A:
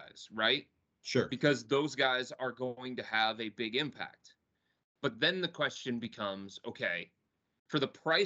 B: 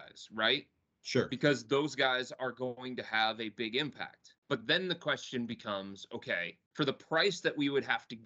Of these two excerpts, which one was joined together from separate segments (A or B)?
B